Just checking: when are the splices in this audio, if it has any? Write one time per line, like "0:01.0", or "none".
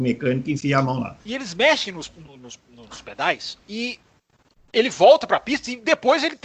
0:01.2